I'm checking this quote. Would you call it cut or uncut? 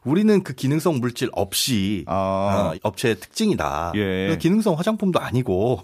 cut